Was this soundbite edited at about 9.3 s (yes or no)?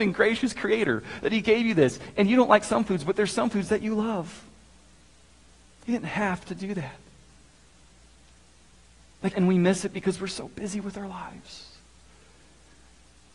yes